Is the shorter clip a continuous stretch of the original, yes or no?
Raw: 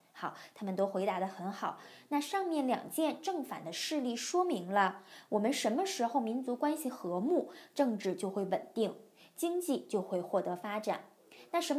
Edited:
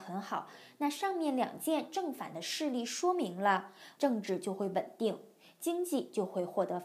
no